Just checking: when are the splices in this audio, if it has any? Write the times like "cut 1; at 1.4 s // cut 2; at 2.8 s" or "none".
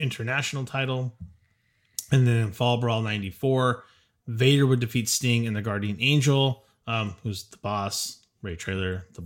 none